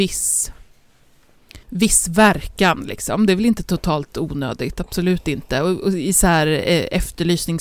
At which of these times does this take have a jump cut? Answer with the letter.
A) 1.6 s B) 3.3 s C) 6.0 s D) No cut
A